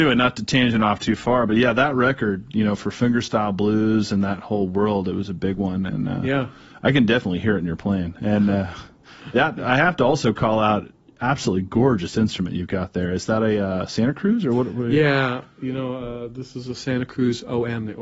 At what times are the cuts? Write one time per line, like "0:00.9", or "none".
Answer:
none